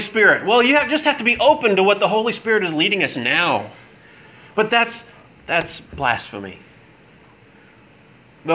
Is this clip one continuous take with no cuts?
yes; 0 cuts

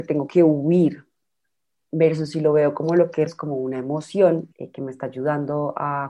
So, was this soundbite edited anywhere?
yes; 2 cuts; at 3.3 s, 4.5 s

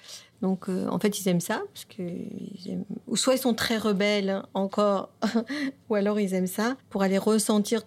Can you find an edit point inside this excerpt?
no; 0 cuts

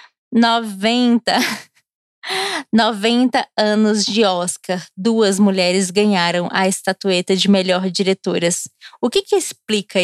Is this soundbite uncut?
yes; 0 cuts

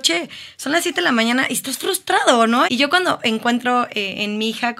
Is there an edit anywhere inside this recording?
yes; 1 cut; at 2.7 s

